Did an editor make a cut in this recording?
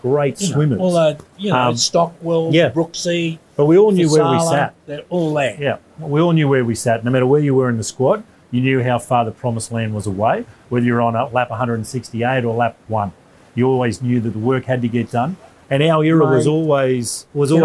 no; 0 cuts

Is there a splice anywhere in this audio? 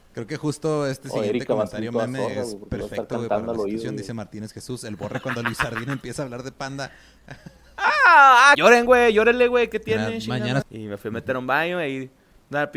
yes; 2 cuts; at 8.5 s, 10.6 s

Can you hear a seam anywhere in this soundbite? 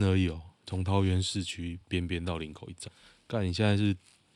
no; 0 cuts

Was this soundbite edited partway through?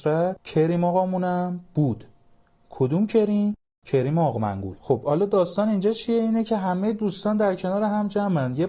no; 0 cuts

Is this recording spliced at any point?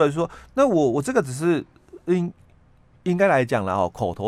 no; 0 cuts

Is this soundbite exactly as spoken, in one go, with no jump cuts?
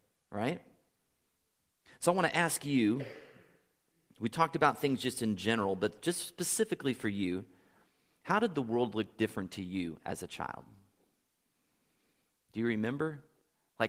yes; 0 cuts

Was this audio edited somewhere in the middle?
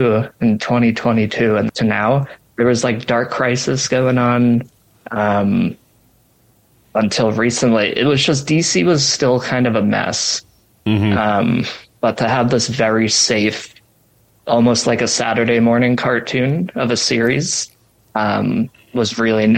yes; 1 cut; at 1.7 s

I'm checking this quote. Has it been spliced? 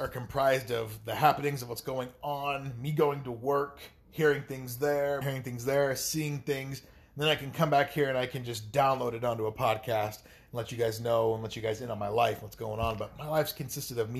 yes; 1 cut; at 5.2 s

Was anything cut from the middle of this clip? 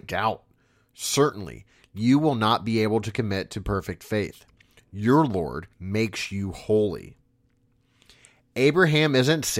yes; 1 cut; at 5.7 s

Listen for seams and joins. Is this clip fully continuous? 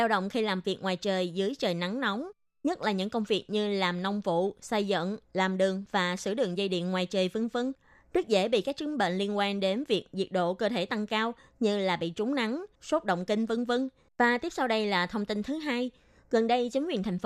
no; 2 cuts; at 12.7 s, 14.1 s

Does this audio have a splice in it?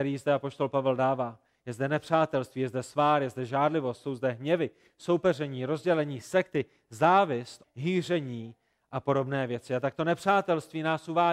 yes; 1 cut; at 7.6 s

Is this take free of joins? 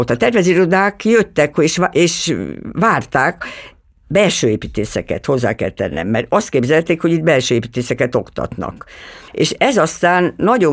no; 1 cut; at 9.3 s

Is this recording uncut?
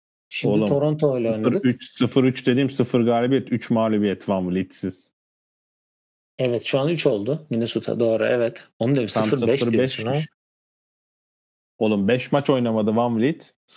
yes; 0 cuts

